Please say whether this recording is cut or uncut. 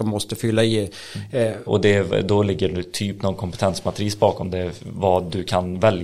cut